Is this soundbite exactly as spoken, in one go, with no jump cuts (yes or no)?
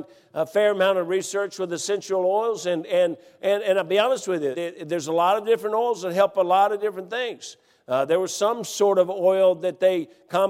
no